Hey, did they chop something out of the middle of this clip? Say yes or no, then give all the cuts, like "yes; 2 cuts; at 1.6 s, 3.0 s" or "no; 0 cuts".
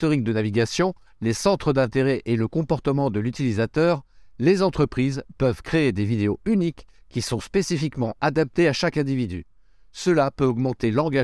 no; 0 cuts